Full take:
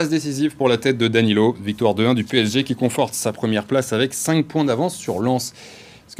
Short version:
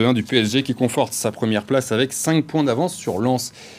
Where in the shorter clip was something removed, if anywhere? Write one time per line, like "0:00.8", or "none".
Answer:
none